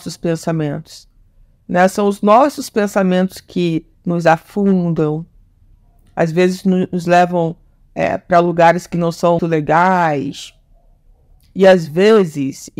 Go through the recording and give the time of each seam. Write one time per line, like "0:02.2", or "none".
0:09.4